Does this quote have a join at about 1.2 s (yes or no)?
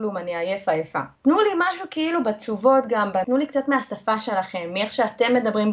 yes